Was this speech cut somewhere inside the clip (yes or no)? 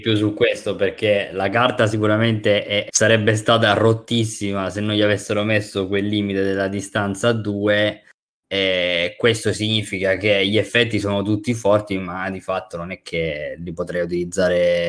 yes